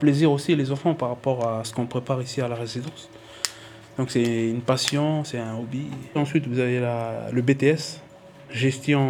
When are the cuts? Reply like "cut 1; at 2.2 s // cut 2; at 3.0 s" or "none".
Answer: cut 1; at 3.8 s // cut 2; at 6.2 s